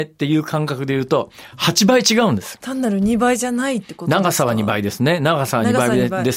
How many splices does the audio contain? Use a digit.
1